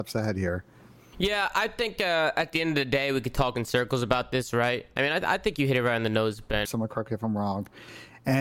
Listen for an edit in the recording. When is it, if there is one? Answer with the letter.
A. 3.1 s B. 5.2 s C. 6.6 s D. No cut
C